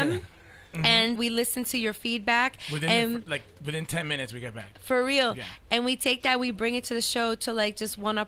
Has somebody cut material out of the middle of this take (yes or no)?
yes